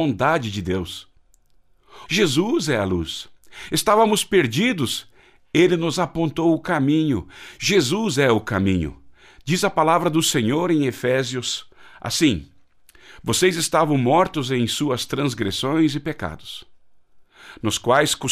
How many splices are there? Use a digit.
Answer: 1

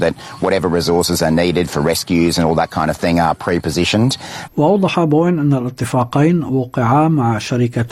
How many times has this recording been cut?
1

